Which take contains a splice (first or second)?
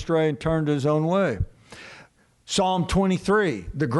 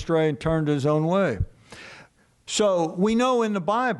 second